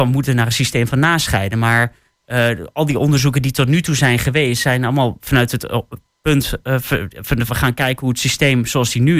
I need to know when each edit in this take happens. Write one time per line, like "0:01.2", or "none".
0:07.5